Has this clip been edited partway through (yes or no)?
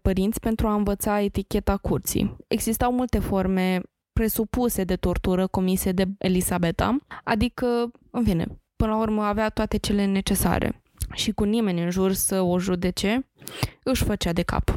yes